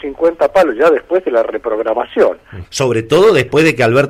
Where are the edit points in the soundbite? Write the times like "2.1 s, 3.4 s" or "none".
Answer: 2.6 s